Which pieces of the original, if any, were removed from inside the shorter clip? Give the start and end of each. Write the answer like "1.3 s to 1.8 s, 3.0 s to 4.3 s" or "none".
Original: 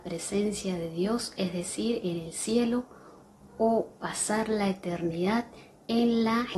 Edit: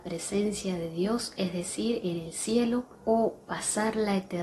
2.9 s to 3.5 s